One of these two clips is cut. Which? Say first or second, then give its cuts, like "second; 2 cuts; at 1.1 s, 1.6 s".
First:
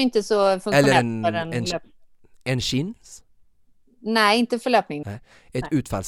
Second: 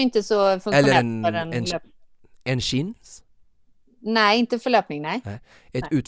first; 1 cut; at 5.0 s